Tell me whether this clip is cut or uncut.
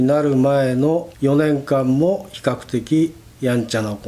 cut